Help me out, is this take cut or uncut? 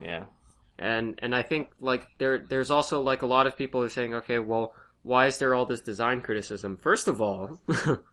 uncut